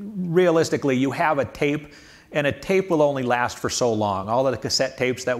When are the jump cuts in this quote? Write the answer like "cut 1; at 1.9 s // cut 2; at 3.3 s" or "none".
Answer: none